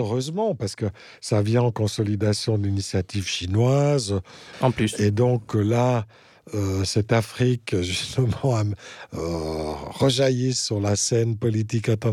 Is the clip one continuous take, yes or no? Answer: no